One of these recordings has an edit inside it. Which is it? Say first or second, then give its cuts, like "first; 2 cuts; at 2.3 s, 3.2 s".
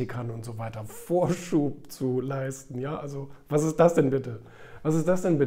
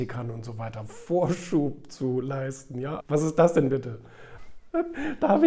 second; 2 cuts; at 3.0 s, 4.4 s